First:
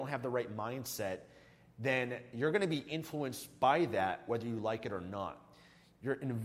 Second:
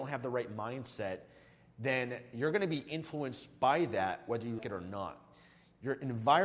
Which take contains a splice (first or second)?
second